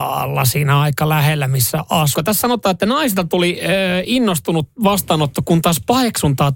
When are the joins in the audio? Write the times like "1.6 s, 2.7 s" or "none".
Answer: 2.1 s

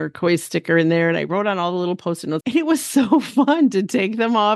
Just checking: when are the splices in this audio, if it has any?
2.4 s

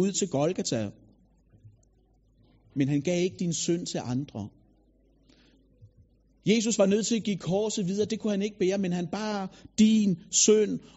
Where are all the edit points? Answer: none

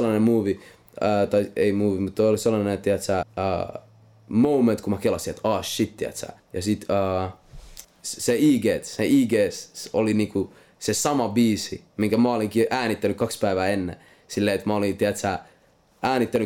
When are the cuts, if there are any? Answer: 3.2 s, 6.4 s, 7.8 s

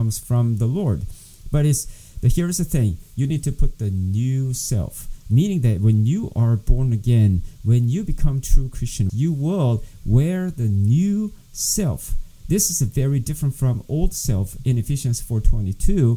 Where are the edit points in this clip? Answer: 9.1 s

